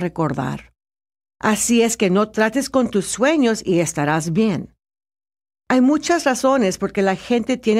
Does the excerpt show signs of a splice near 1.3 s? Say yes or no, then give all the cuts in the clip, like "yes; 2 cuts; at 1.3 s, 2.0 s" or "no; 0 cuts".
yes; 1 cut; at 1.3 s